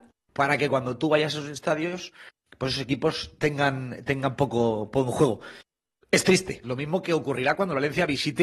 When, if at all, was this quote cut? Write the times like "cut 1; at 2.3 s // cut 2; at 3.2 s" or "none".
cut 1; at 6.6 s